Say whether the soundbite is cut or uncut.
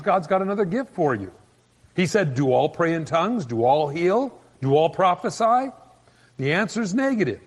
uncut